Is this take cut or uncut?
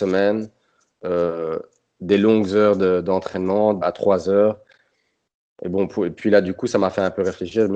cut